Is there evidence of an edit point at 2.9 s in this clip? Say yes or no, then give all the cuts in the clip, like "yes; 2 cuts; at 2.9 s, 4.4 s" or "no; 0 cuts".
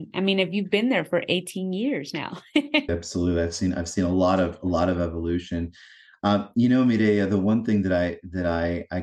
yes; 1 cut; at 2.9 s